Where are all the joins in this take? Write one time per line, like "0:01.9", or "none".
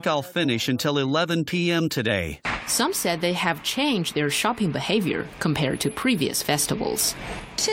none

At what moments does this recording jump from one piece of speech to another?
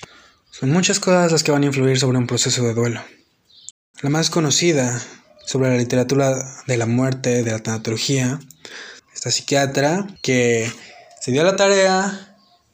0:03.9
0:09.0
0:10.2

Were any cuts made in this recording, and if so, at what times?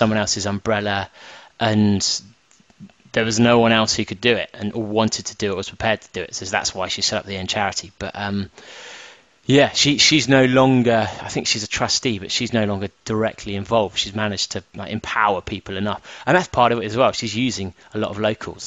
none

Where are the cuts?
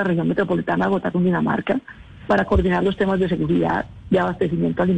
none

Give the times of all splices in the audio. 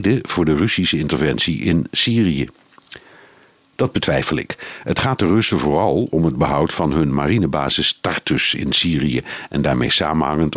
none

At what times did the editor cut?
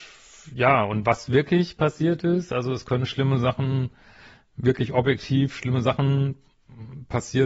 none

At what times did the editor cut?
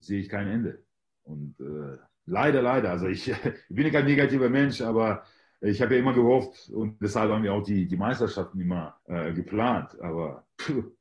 0:09.0

